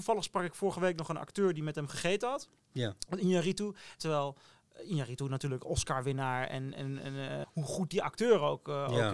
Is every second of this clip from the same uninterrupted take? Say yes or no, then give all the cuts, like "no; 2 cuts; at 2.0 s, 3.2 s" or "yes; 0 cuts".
no; 2 cuts; at 4.0 s, 7.4 s